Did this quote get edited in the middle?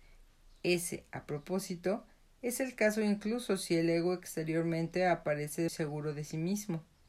yes; 1 cut; at 5.7 s

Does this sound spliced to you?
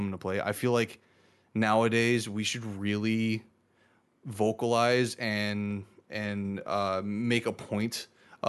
no; 0 cuts

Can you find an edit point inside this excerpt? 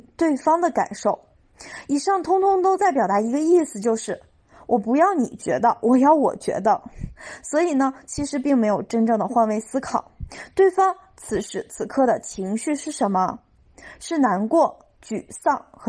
no; 0 cuts

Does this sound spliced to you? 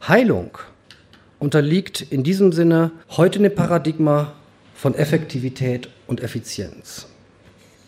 yes; 1 cut; at 3.0 s

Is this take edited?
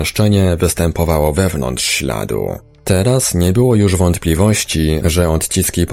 no; 0 cuts

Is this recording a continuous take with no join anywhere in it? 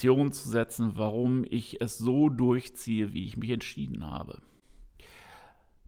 yes; 0 cuts

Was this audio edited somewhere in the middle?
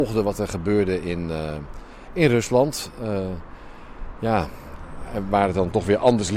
no; 0 cuts

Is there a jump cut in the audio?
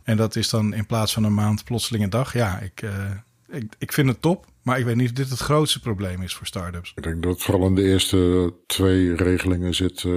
no; 0 cuts

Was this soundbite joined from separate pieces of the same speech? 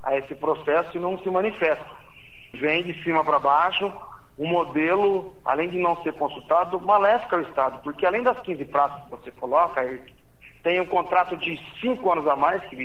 yes; 1 cut; at 2.5 s

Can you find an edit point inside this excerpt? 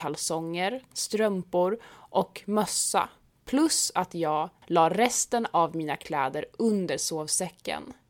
yes; 2 cuts; at 0.9 s, 4.6 s

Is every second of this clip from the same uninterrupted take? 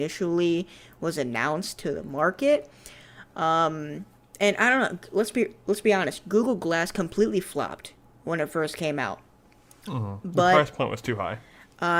yes; 0 cuts

